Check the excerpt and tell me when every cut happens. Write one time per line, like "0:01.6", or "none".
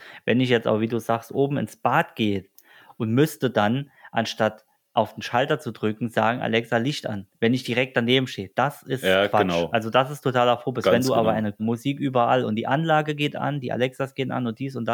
0:11.6